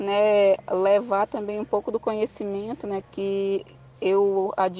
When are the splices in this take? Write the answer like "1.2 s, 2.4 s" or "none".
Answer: 3.0 s